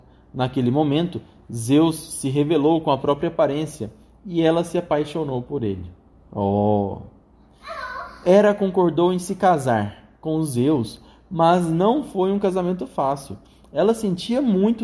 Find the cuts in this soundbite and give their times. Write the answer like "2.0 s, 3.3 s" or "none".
none

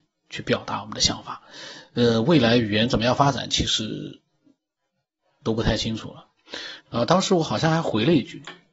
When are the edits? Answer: none

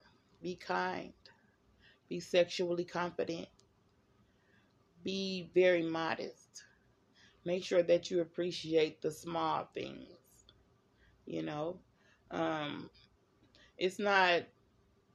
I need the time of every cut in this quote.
none

